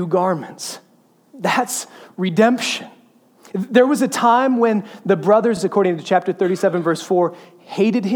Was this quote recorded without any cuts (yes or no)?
yes